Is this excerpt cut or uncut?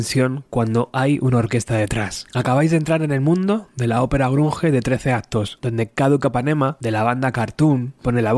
uncut